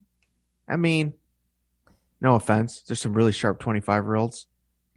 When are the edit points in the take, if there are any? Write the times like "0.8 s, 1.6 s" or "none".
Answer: none